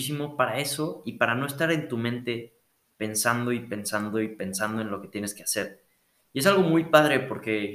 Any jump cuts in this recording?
no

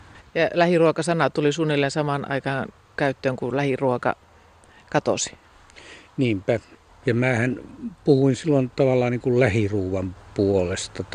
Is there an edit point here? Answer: yes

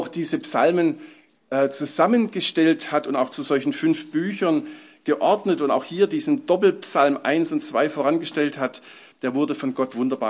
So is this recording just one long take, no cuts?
yes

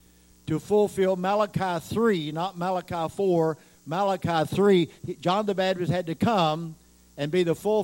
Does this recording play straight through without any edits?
yes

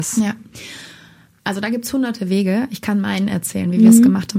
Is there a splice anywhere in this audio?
no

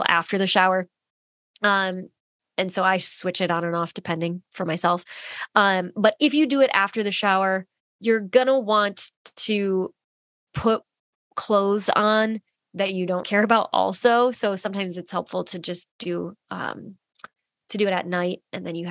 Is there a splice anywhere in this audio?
yes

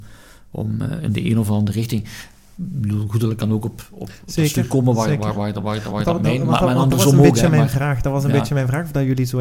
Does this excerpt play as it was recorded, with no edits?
yes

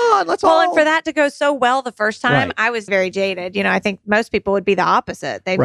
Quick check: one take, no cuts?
no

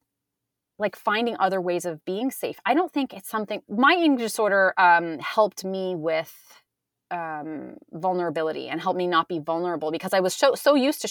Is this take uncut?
no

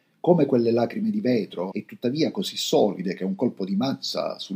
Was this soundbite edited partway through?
yes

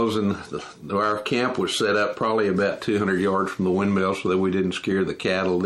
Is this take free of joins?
yes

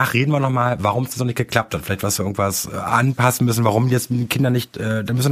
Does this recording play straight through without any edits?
yes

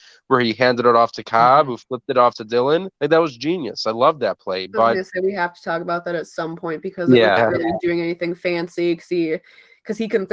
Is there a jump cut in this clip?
yes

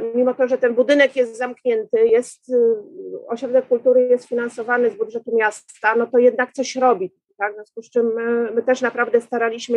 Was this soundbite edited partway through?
no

